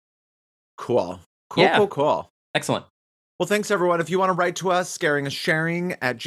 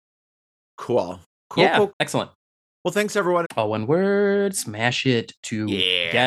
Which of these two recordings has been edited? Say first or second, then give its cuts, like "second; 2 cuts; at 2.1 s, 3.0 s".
second; 2 cuts; at 1.9 s, 3.4 s